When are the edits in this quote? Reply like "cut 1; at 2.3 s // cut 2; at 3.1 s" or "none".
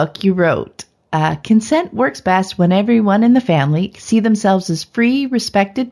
cut 1; at 3.9 s